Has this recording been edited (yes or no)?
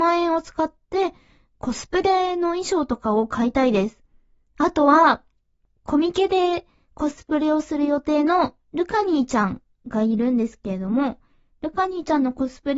no